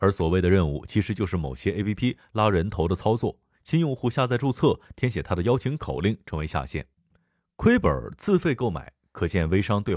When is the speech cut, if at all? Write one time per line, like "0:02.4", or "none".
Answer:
none